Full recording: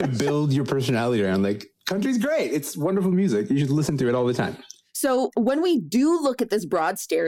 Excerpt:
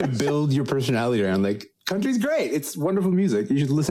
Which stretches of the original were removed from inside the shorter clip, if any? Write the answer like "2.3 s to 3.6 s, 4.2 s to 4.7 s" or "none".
none